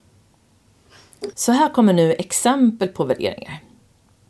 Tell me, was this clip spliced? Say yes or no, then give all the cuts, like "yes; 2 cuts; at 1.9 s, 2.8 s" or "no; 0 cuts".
yes; 1 cut; at 1.3 s